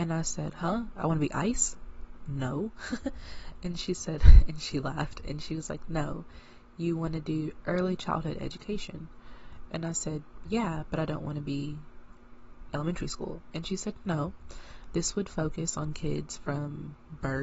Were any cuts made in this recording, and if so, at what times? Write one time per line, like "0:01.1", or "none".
0:10.4